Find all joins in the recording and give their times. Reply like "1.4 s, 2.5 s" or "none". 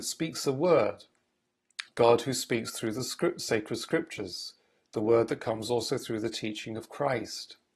1.9 s